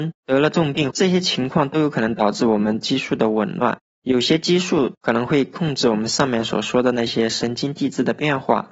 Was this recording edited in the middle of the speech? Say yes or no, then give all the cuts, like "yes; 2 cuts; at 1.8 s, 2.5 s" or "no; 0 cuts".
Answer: yes; 1 cut; at 0.9 s